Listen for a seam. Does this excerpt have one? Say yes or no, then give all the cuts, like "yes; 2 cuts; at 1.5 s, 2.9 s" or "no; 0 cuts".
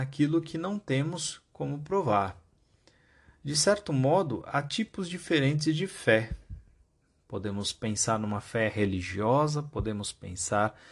no; 0 cuts